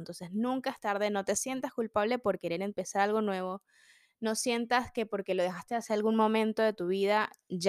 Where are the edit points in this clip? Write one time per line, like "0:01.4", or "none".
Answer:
none

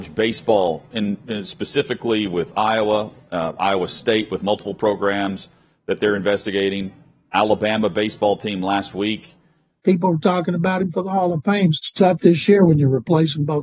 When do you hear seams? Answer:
0:09.8
0:11.8

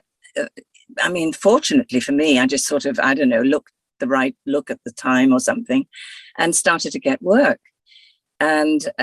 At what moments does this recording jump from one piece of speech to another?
none

